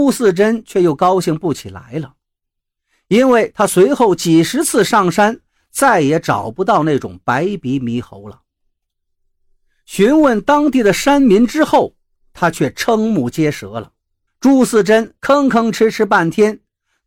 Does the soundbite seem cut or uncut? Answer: cut